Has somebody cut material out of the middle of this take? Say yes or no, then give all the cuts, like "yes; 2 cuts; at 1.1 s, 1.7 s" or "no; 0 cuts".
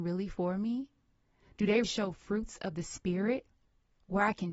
yes; 1 cut; at 1.8 s